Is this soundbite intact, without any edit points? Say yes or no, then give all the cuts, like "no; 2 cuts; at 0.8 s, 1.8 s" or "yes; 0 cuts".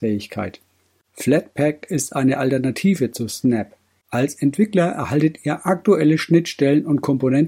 no; 1 cut; at 1.0 s